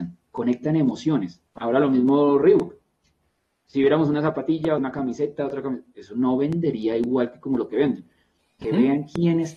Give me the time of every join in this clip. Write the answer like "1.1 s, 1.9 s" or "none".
1.5 s, 4.8 s, 8.6 s